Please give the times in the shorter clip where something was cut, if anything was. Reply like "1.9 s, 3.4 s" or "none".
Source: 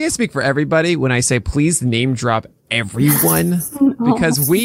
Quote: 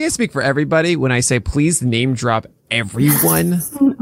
none